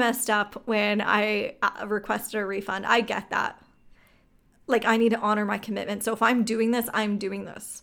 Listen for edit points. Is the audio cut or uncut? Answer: uncut